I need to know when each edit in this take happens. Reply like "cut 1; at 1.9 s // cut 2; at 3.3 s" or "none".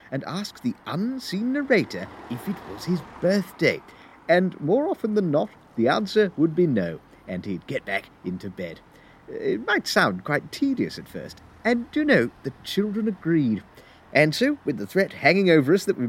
none